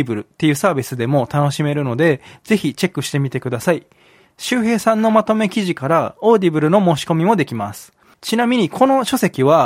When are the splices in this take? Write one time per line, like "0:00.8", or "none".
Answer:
0:08.1